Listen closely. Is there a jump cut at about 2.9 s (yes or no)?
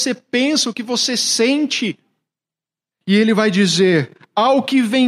yes